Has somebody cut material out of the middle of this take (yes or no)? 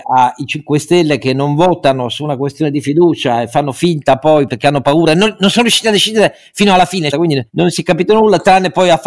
yes